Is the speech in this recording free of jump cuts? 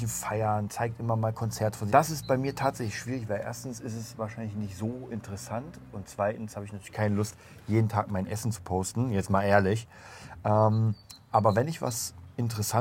no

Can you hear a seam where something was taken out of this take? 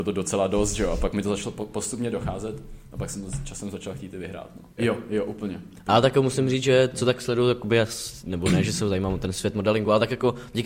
yes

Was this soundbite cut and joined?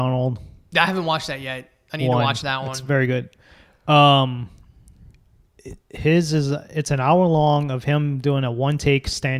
no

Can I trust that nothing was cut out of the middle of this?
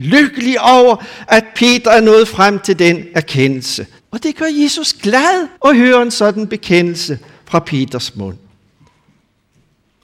no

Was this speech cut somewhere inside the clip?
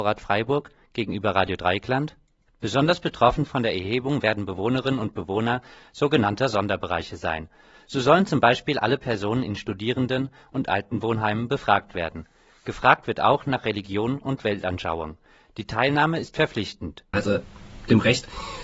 yes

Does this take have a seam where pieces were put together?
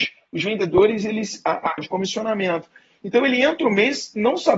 yes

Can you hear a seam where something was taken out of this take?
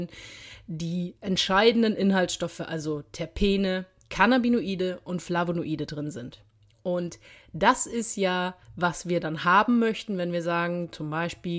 no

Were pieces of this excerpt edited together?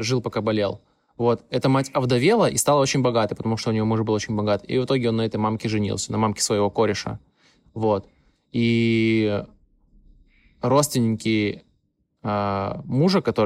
no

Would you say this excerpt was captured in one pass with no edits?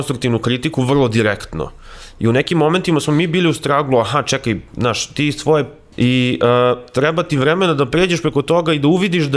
no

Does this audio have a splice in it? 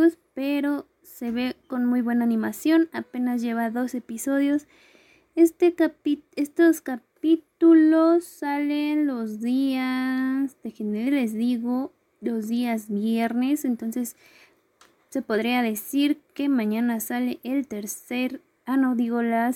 no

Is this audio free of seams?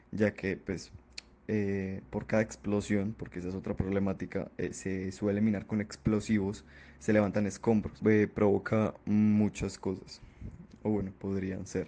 no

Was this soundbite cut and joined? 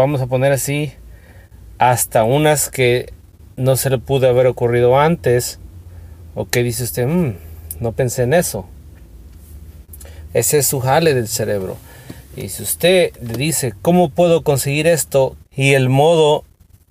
yes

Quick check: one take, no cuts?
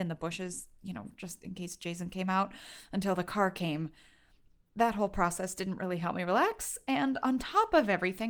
yes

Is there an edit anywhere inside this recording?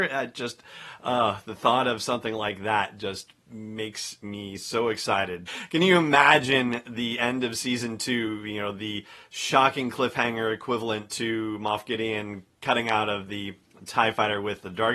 yes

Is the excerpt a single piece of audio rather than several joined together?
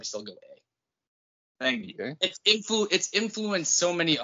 yes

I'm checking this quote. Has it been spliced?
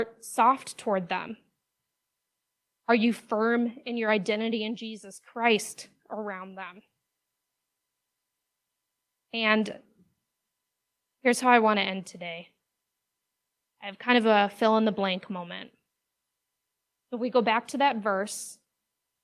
no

